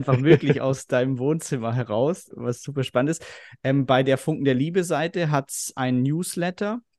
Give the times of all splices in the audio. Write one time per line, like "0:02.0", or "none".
0:02.3